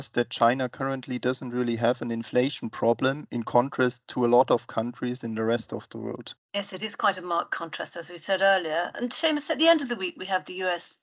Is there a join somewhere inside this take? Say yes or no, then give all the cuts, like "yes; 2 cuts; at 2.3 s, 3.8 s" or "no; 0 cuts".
no; 0 cuts